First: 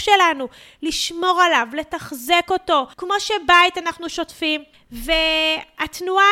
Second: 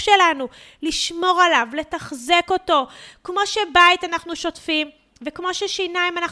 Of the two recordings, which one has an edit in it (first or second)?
first